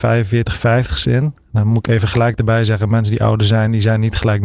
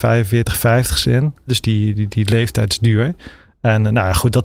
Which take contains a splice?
second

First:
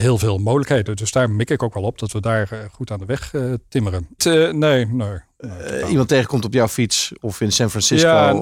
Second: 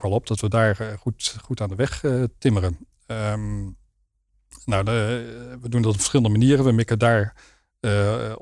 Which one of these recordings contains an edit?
first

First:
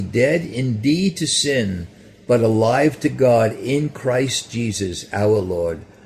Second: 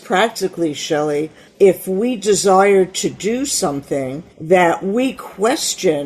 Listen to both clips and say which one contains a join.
second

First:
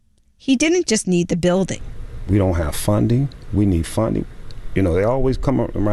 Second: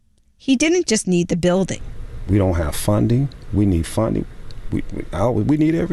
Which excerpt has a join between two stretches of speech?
second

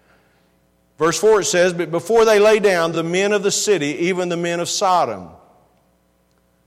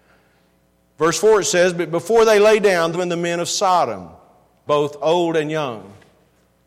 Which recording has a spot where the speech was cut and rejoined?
second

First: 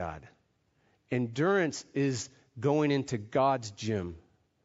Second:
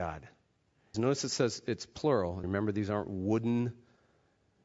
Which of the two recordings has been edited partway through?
second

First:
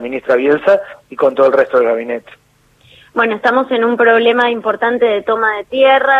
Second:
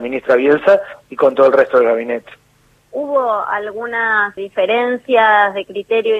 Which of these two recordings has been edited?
second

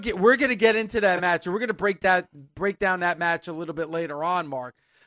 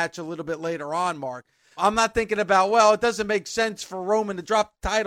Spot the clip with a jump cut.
second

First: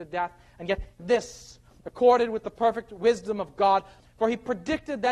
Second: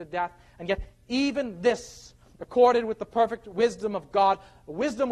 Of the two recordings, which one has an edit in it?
first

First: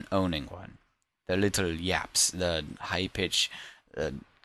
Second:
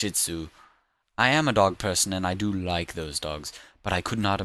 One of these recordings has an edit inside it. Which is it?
second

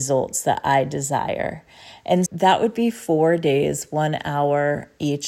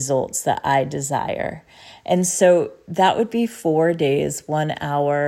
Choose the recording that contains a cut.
first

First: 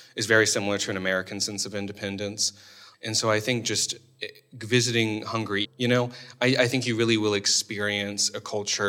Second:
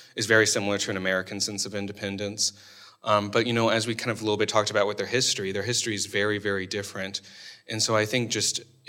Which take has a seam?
first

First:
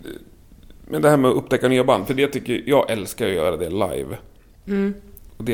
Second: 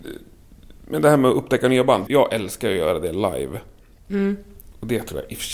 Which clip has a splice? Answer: second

